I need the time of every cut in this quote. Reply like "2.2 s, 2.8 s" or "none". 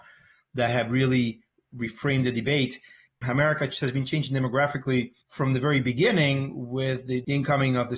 3.1 s, 5.2 s